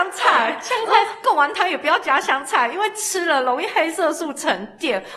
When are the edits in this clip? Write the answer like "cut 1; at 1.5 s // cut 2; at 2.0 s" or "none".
none

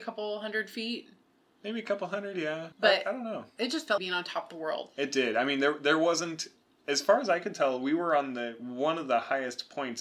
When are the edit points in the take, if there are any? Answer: cut 1; at 2.7 s // cut 2; at 4.0 s

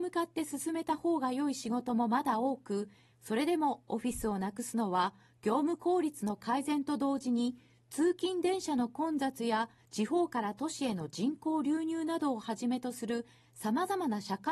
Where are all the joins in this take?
cut 1; at 3.1 s

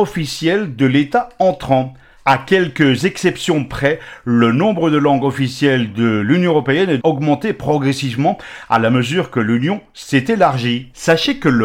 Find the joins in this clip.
cut 1; at 7.0 s

